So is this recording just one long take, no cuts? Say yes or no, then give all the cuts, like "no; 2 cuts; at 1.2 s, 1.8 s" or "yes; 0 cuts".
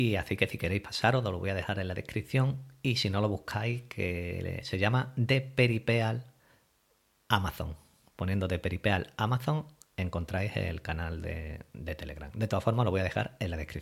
yes; 0 cuts